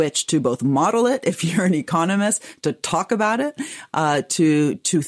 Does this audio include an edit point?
no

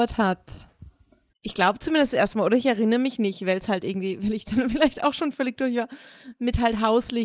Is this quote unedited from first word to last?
no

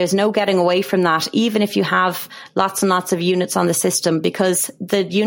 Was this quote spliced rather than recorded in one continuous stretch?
no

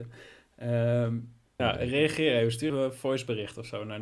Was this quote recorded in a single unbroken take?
no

